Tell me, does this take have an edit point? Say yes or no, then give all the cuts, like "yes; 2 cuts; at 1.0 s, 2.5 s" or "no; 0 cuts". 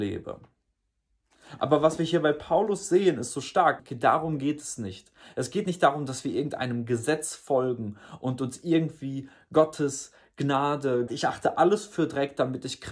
yes; 3 cuts; at 1.6 s, 3.8 s, 11.1 s